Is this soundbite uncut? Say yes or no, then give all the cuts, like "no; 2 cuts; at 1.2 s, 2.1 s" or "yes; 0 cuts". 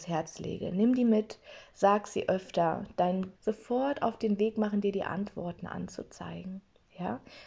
no; 1 cut; at 3.3 s